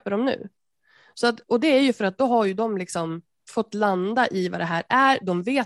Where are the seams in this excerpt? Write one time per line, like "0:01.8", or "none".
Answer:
none